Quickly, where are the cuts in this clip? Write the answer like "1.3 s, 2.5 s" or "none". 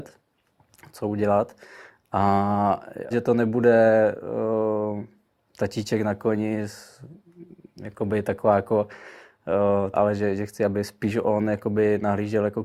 3.1 s, 9.9 s

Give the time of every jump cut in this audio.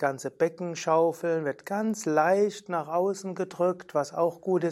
none

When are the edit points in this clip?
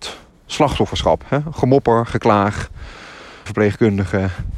3.5 s

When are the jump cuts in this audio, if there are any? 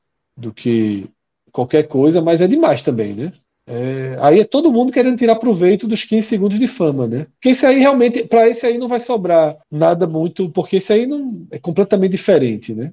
3.5 s, 9.6 s

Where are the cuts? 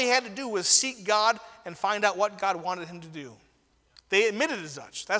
4.0 s

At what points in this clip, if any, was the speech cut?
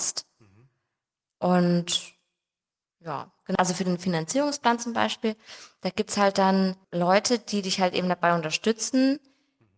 3.6 s, 6.8 s

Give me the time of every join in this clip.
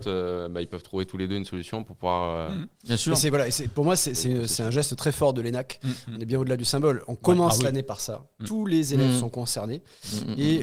none

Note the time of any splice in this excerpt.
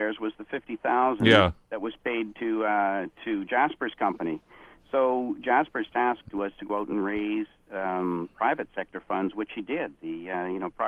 6.2 s

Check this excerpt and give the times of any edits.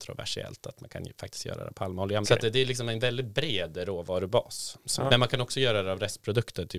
2.2 s, 5.1 s

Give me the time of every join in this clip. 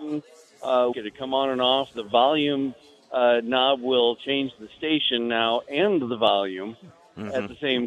0.9 s

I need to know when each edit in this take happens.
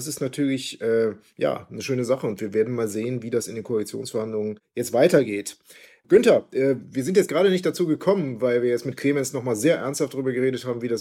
none

